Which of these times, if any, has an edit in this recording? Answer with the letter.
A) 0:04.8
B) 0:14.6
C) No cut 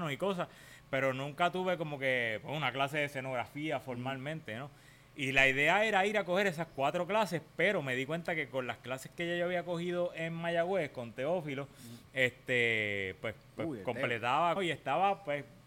B